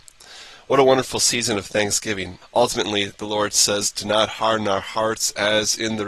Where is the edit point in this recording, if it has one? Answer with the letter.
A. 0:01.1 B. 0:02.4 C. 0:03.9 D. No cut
B